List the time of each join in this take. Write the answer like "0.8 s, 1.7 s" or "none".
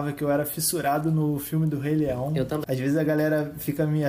2.6 s